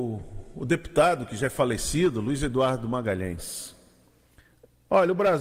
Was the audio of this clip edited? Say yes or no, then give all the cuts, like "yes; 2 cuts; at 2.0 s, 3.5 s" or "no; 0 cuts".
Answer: no; 0 cuts